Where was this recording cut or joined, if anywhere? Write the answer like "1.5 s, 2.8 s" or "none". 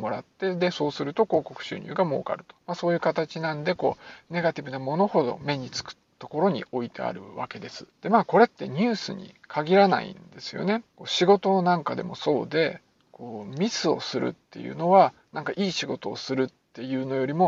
2.6 s, 7.9 s, 10.9 s